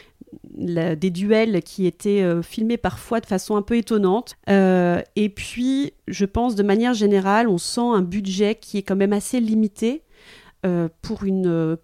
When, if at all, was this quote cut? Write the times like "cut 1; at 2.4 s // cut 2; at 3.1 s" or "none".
cut 1; at 4.3 s